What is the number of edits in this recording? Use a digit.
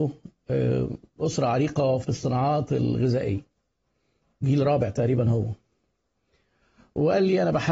1